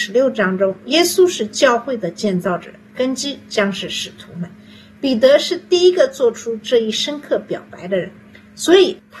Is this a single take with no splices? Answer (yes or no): yes